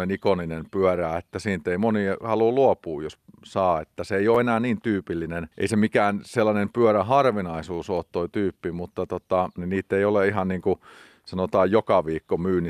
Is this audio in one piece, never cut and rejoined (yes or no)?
no